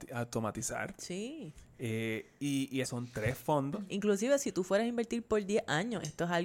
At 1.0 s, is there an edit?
no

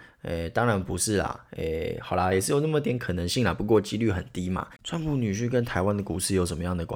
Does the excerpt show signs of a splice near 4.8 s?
yes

